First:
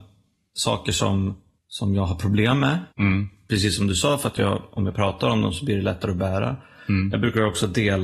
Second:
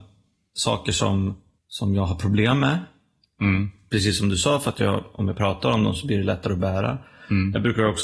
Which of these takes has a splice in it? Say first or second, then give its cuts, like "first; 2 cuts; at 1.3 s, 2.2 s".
first; 1 cut; at 2.9 s